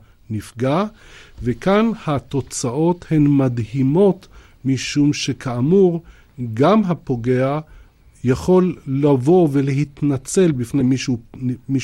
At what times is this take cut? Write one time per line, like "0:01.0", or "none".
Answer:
none